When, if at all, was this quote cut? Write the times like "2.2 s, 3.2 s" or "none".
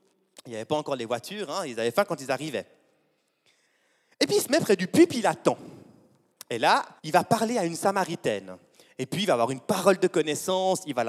7.0 s